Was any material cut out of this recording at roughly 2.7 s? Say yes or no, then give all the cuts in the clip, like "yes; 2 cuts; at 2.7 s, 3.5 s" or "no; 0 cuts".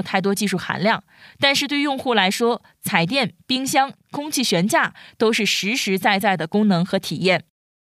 no; 1 cut; at 4.0 s